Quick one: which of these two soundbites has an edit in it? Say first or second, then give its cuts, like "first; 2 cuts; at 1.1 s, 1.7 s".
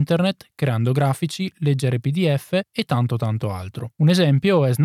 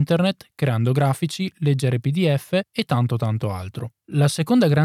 first; 1 cut; at 3.9 s